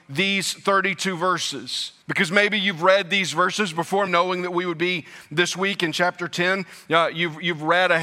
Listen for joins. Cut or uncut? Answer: cut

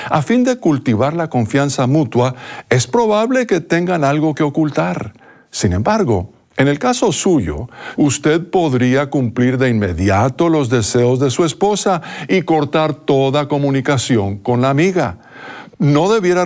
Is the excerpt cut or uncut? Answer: cut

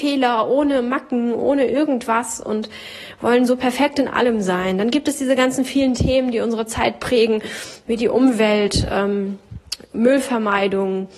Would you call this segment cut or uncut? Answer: uncut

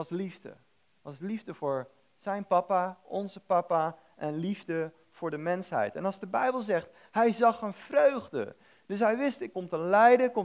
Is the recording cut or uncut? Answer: cut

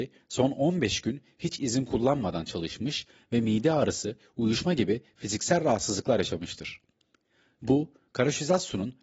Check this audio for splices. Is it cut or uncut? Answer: cut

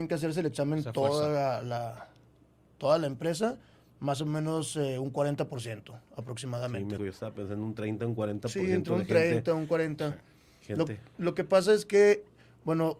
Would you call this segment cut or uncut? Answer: cut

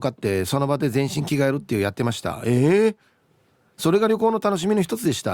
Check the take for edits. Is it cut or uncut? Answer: uncut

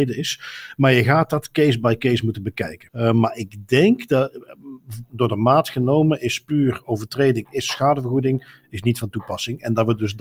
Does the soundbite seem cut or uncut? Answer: cut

